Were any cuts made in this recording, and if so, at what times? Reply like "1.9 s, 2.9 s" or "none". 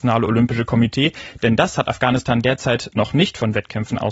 none